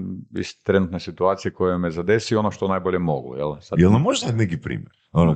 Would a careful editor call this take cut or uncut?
uncut